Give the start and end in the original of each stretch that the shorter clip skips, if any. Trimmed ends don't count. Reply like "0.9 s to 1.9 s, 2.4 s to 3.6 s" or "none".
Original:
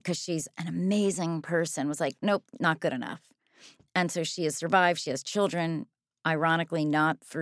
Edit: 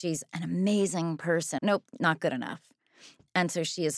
1.8 s to 2.2 s